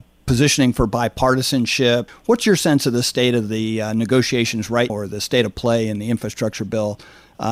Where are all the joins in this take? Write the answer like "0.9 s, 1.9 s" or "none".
2.1 s, 4.9 s